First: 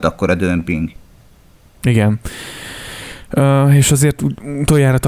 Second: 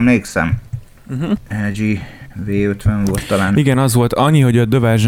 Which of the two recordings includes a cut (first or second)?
second